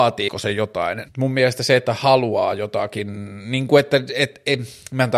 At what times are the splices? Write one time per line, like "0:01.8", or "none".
0:01.0